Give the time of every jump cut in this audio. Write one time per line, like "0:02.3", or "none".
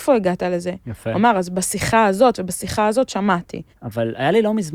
0:03.7

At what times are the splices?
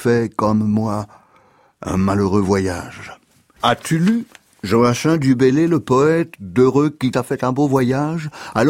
0:03.6
0:07.1

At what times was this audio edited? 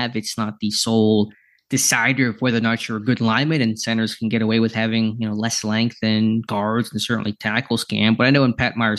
none

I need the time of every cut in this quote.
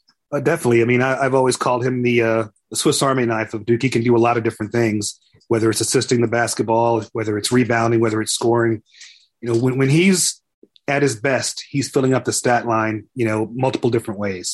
none

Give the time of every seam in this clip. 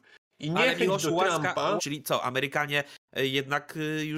0:01.8

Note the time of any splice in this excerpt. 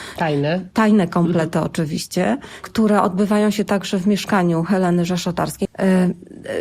0:05.7

